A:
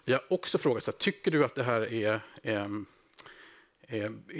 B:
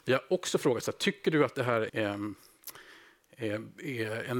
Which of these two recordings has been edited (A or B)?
B